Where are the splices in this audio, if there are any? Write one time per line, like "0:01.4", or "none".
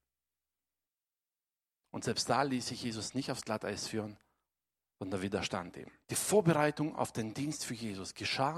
0:06.0